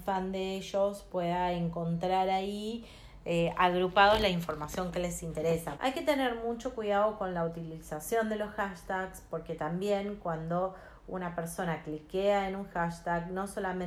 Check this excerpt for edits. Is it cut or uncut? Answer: cut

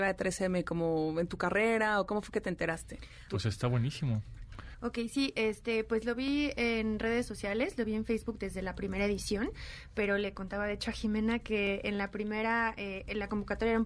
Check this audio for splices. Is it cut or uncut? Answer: cut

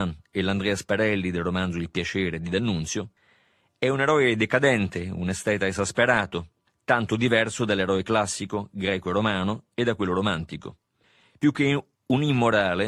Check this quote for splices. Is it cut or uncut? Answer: uncut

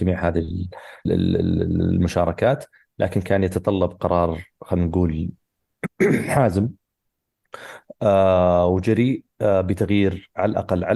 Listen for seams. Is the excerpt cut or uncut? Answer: cut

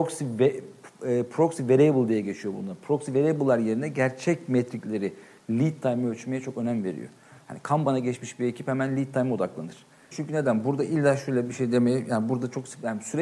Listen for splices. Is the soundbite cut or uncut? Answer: cut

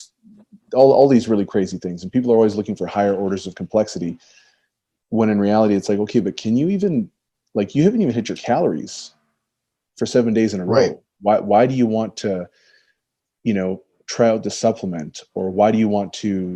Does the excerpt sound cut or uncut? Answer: uncut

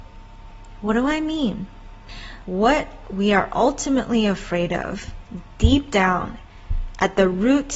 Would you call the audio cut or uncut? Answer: cut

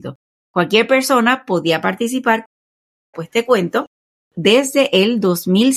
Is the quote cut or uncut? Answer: cut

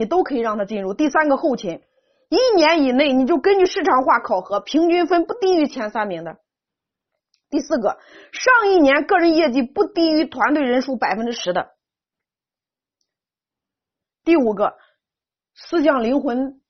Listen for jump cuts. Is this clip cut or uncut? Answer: uncut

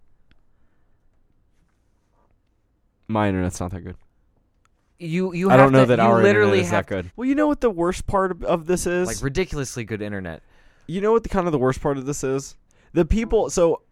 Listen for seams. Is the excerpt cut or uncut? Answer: cut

